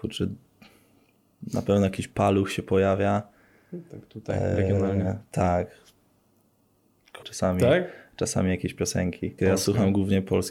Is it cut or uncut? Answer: cut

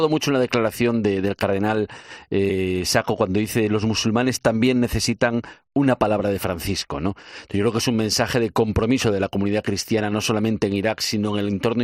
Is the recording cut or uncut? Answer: uncut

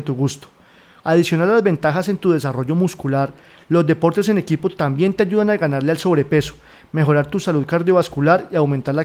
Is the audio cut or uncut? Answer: cut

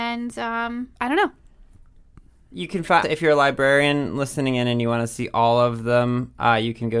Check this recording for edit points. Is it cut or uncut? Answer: cut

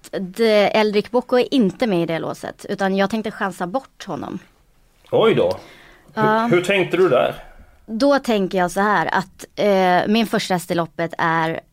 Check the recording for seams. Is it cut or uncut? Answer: uncut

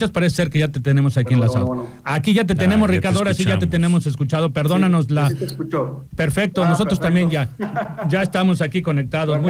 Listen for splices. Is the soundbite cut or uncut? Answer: uncut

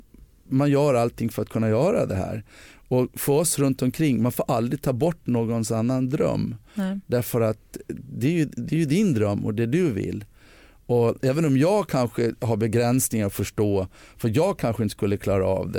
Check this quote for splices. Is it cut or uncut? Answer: uncut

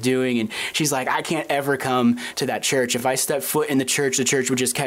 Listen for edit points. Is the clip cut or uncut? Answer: uncut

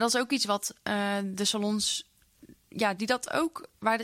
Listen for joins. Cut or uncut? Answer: cut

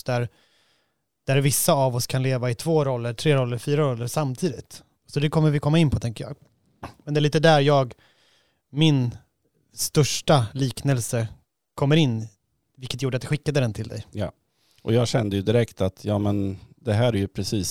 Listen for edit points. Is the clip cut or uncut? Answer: cut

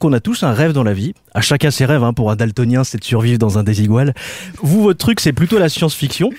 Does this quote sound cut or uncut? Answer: cut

